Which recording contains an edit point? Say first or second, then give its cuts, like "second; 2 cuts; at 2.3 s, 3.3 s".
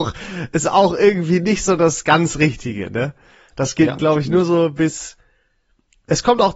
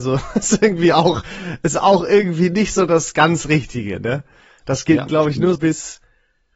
second; 1 cut; at 5.6 s